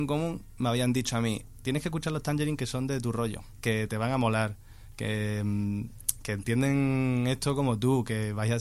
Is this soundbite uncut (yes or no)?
no